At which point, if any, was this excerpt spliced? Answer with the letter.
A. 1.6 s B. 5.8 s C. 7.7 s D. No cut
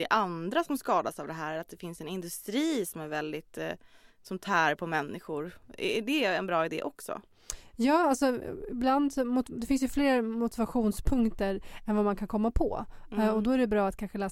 D